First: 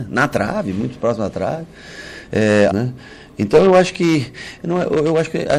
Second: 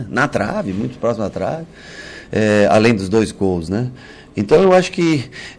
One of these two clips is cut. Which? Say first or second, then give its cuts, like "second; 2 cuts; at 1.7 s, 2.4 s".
first; 1 cut; at 2.7 s